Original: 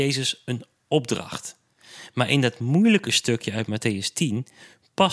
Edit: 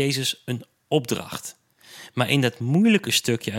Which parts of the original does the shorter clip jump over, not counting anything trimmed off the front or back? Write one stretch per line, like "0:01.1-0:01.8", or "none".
none